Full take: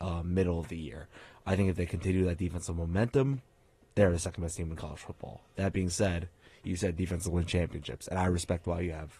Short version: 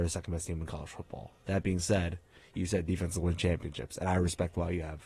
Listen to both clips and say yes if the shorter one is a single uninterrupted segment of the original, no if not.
yes